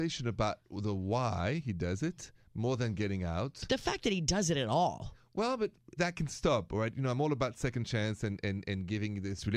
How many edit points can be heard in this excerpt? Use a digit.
1